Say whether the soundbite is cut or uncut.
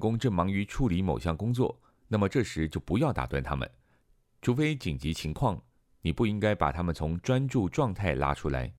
uncut